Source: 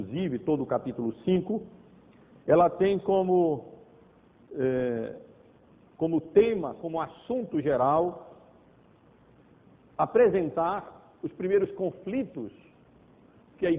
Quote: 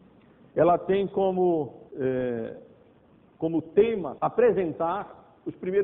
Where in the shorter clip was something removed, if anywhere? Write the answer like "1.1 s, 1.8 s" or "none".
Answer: 1.9 s, 4.2 s